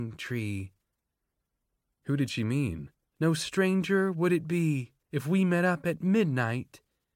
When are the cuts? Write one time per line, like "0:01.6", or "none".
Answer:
0:03.1
0:05.0